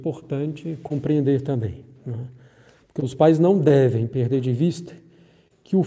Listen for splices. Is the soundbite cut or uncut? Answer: uncut